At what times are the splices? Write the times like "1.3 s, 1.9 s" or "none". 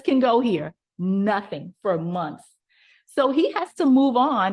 none